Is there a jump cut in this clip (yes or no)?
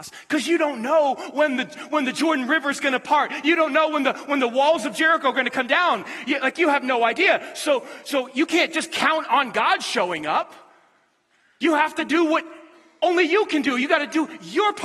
no